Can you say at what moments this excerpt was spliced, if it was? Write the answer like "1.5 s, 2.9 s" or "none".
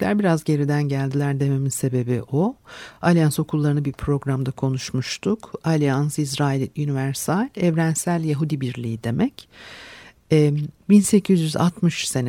none